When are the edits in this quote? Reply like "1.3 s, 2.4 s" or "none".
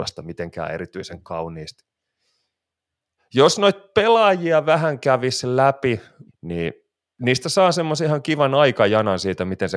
3.2 s, 6.3 s